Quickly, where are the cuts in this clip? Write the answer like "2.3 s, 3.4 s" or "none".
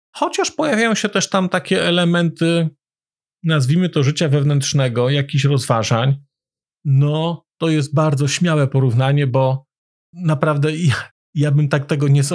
6.6 s